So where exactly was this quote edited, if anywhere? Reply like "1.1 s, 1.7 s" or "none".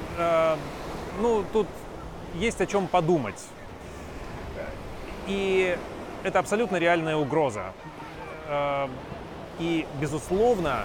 9.6 s